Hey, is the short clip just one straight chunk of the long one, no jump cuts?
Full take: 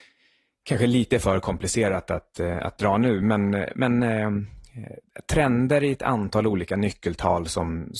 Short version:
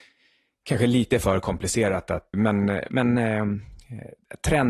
no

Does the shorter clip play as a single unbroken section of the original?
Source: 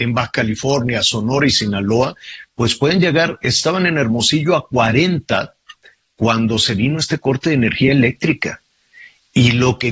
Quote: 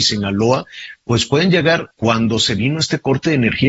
no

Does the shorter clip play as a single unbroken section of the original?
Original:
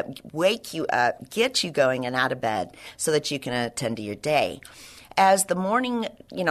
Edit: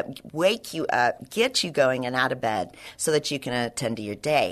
yes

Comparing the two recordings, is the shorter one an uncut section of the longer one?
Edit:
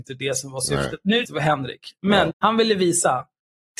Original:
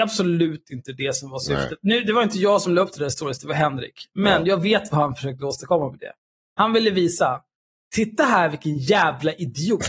no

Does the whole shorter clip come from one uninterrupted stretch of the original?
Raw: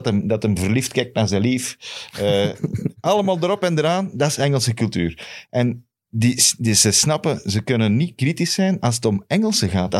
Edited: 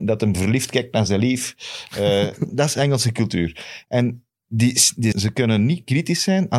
no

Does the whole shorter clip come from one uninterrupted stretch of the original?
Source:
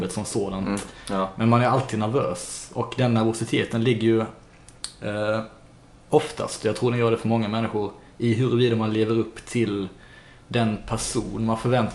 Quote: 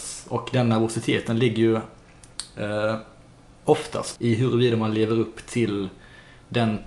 no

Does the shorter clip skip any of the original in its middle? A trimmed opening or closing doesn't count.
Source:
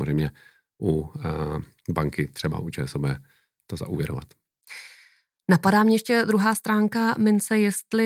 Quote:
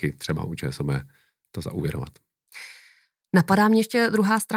no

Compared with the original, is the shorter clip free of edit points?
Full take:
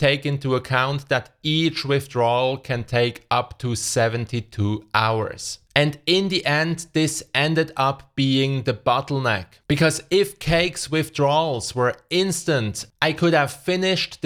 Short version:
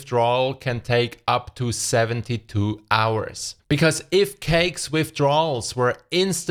no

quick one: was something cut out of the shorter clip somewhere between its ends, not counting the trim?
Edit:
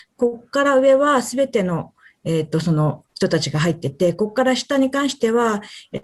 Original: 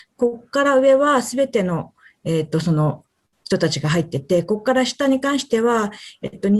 yes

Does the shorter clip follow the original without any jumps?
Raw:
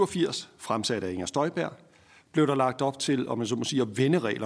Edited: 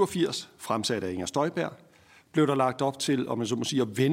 yes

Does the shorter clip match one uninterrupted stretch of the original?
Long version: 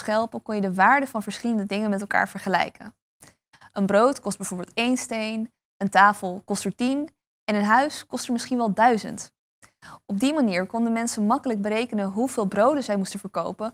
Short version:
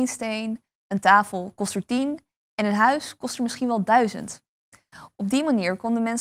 yes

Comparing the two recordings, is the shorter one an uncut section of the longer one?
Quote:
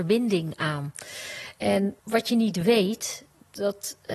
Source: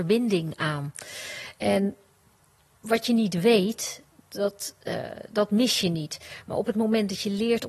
no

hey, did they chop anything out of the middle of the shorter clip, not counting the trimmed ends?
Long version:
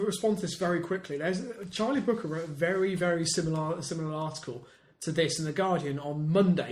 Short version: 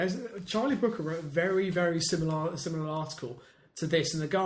no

